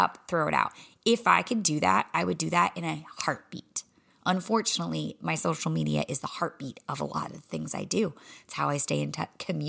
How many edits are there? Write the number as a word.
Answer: zero